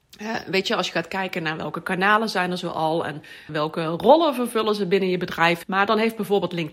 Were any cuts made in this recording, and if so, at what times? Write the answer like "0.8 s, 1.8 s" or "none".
3.5 s, 5.6 s